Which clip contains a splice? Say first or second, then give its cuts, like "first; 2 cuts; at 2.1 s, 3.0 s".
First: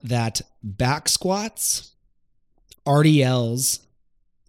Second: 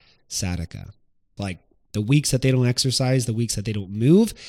second; 1 cut; at 1.4 s